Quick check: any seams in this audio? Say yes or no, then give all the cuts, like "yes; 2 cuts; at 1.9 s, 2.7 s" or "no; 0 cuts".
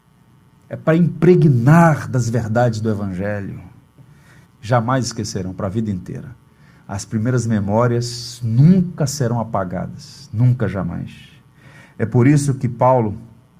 yes; 1 cut; at 4.4 s